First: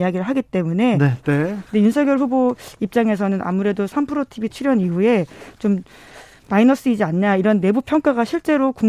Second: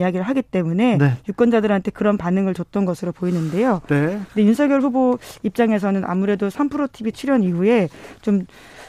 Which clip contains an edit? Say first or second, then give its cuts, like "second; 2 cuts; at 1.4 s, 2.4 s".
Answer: first; 1 cut; at 1.2 s